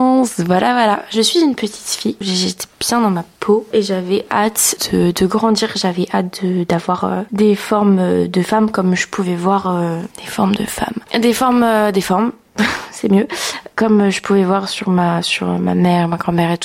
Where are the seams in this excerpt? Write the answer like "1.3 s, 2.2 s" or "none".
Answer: none